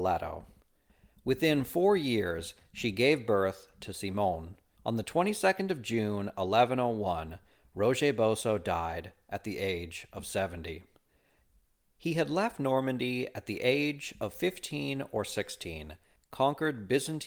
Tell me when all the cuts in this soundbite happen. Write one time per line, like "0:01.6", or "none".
0:04.8
0:16.2

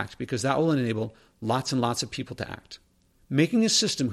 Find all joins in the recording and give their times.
0:03.2

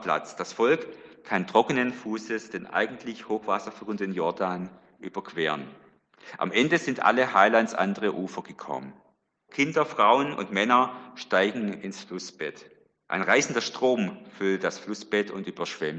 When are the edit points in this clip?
0:09.5
0:13.1

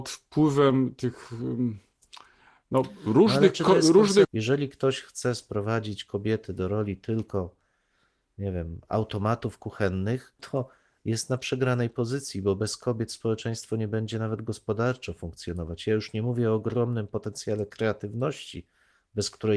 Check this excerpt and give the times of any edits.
0:04.2
0:10.4

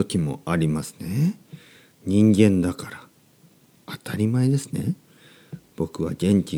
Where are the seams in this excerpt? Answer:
none

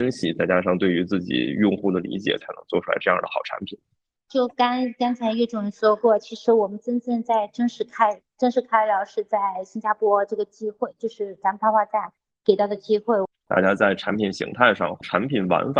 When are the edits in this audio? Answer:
0:04.1
0:13.3

